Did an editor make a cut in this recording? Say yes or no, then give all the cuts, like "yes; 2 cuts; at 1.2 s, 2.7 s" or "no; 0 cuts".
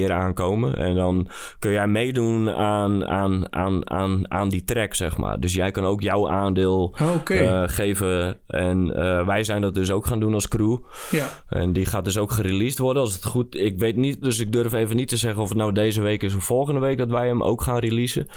yes; 1 cut; at 14.2 s